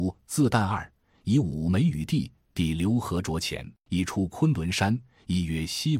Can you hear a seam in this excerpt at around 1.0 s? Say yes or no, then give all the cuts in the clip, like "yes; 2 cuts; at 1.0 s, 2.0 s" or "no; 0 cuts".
no; 1 cut; at 3.9 s